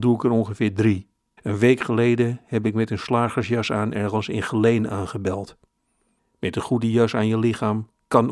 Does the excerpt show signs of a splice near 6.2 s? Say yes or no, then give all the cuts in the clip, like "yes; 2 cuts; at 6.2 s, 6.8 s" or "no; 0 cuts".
yes; 2 cuts; at 1.4 s, 6.2 s